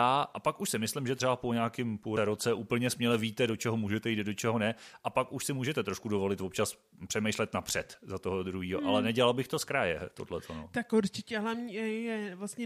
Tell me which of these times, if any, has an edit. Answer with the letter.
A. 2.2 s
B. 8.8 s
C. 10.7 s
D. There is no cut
A